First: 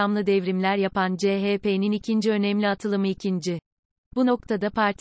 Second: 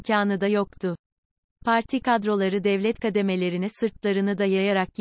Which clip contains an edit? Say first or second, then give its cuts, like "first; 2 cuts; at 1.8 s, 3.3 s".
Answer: first; 1 cut; at 4.0 s